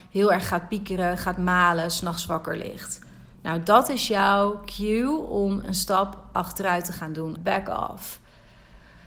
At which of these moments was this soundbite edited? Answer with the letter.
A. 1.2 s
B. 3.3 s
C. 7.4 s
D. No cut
C